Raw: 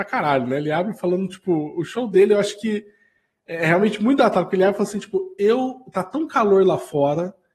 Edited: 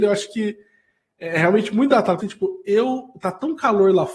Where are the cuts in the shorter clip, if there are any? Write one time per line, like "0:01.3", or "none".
0:02.2